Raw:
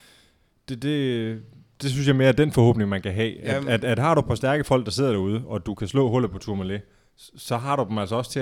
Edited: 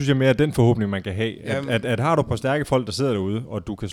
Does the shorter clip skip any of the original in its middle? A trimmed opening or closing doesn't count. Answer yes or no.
no